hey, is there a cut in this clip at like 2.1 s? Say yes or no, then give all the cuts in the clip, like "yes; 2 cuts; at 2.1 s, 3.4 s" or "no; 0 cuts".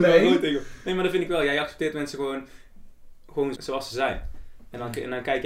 no; 1 cut; at 3.5 s